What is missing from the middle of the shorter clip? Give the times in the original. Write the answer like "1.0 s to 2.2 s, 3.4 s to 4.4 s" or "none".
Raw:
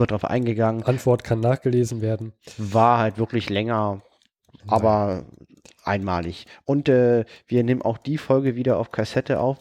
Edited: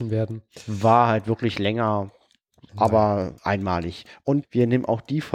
5.3 s to 5.8 s, 6.8 s to 7.4 s